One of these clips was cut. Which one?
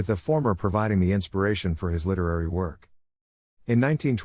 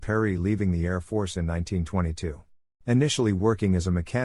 second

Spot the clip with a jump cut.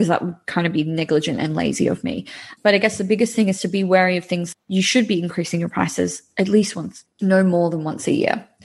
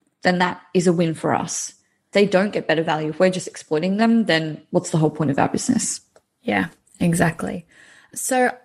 first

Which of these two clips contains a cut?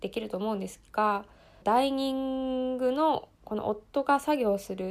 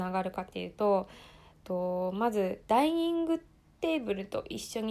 first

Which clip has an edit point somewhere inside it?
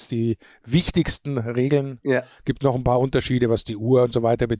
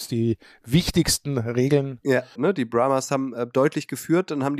second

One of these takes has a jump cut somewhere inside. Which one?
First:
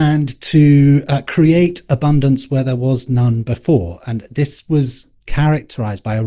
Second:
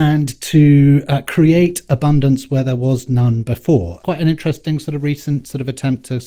second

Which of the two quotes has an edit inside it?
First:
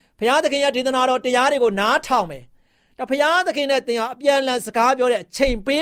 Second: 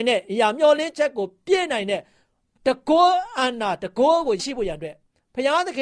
second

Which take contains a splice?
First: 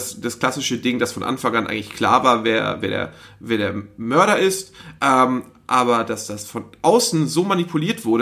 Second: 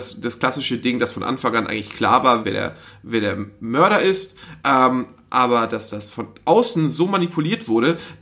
second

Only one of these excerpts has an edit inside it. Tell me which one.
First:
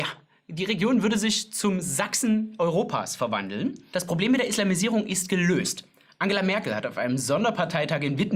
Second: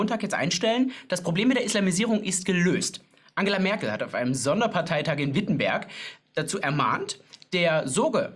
first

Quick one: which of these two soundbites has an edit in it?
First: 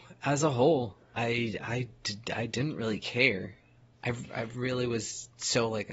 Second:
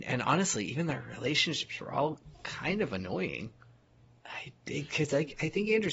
first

